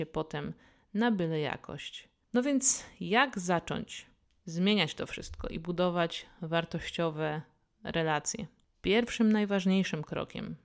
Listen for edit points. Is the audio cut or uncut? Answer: uncut